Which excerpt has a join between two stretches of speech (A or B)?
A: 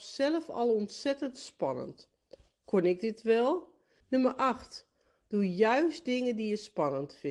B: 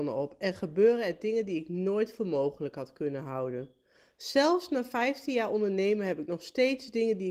A